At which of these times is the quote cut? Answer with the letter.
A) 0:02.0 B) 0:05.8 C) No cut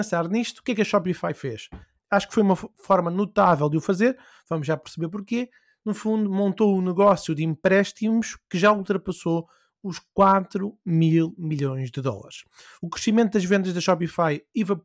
A